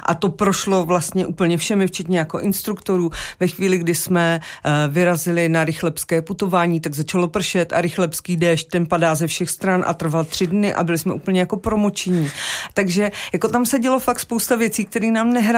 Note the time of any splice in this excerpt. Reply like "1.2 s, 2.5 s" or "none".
none

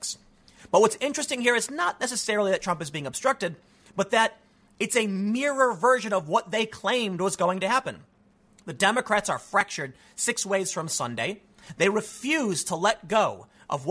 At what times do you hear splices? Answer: none

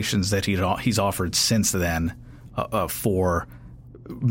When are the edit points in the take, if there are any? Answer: none

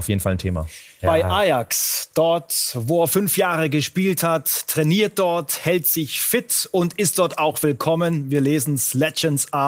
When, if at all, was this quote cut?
1.0 s

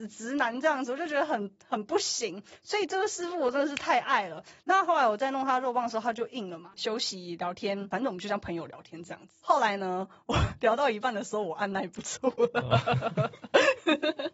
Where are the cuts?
6.7 s

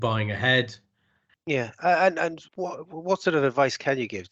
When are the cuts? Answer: 1.3 s, 2.5 s

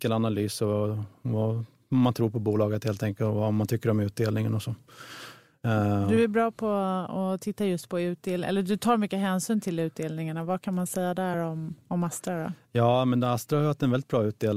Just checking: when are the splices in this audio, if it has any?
none

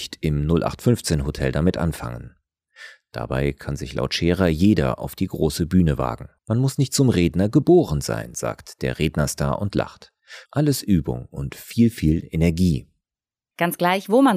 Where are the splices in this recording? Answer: 6.4 s, 10.4 s

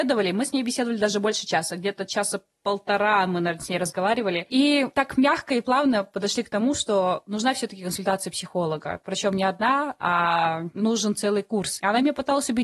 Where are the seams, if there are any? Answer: none

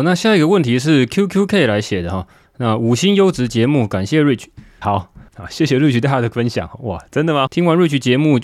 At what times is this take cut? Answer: 4.8 s, 7.5 s

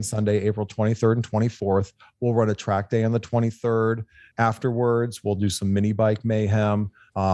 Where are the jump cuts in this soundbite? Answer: none

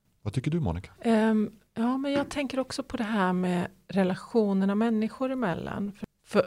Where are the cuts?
1.0 s

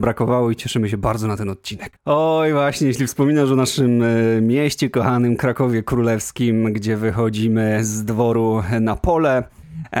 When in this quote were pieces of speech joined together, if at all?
2.0 s

